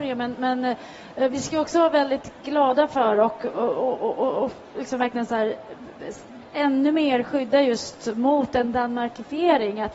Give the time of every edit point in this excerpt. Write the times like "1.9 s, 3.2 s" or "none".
none